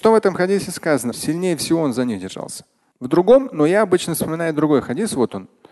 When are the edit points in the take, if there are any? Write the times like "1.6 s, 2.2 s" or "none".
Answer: 1.1 s, 2.9 s